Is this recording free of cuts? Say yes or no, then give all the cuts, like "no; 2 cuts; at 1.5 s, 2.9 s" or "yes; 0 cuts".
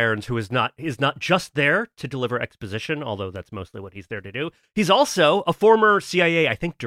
yes; 0 cuts